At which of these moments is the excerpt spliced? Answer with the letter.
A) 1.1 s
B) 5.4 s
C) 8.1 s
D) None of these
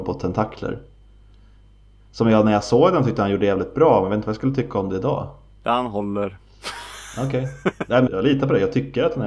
C